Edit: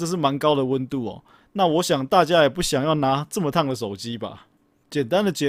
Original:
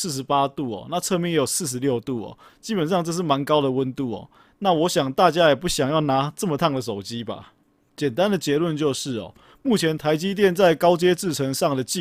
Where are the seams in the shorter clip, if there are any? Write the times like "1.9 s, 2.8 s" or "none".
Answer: none